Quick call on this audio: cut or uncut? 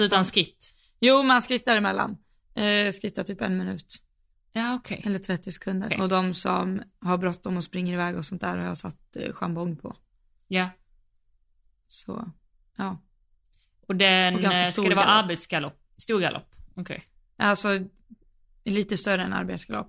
cut